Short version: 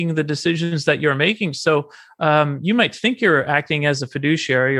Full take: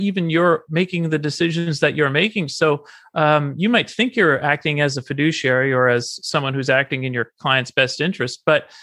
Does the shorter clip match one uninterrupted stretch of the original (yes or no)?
yes